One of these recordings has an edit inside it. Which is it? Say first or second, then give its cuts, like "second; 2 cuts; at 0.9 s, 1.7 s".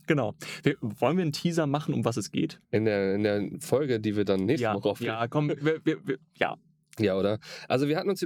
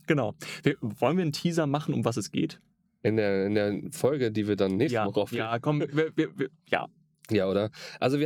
first; 1 cut; at 2.6 s